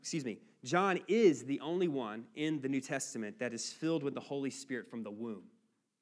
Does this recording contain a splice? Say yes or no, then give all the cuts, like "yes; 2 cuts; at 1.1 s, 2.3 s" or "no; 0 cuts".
no; 0 cuts